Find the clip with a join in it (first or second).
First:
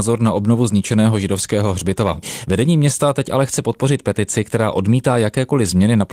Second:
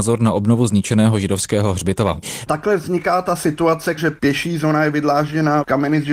second